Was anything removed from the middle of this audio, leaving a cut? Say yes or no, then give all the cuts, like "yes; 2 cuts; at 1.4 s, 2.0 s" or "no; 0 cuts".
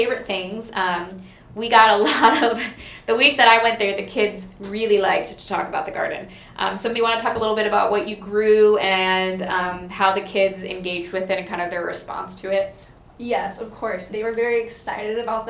yes; 2 cuts; at 6.9 s, 14.1 s